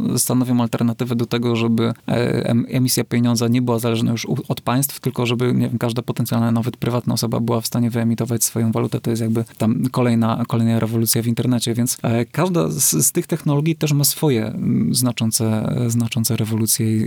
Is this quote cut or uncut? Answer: uncut